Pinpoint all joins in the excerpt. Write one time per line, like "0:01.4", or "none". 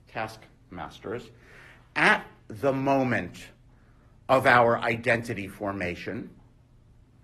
none